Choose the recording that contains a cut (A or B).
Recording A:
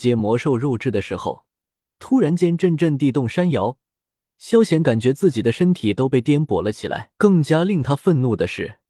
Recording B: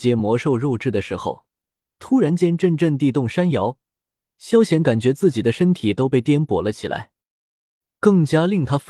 A